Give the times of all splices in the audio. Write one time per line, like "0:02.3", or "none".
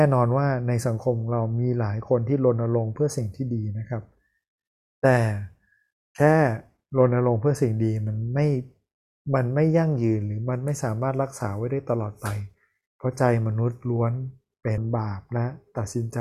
0:14.8